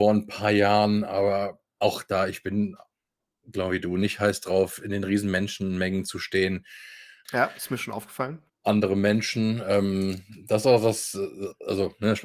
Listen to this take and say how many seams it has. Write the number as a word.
one